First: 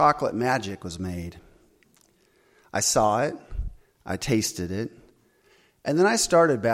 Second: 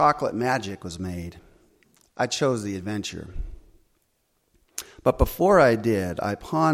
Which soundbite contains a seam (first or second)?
second